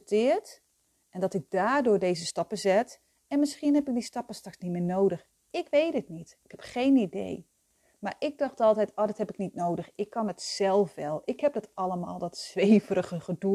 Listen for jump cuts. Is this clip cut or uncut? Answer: uncut